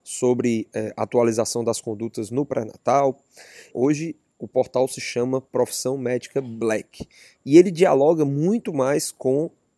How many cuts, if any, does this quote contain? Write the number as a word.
one